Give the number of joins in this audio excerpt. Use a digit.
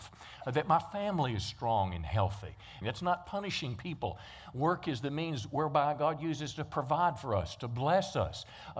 1